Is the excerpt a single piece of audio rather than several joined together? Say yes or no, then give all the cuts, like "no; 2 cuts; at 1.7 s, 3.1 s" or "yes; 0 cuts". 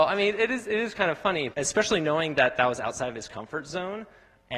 no; 1 cut; at 1.5 s